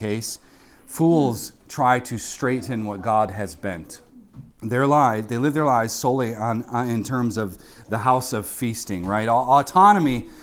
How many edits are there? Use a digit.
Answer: 1